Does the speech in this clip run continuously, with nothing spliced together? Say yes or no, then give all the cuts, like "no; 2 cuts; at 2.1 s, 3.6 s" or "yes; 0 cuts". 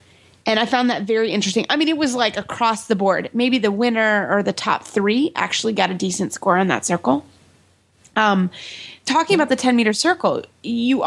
no; 1 cut; at 9.0 s